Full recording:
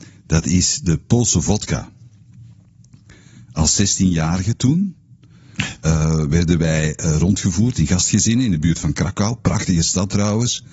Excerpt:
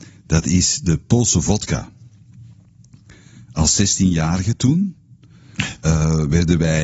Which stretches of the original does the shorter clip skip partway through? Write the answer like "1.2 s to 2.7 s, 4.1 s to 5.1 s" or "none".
none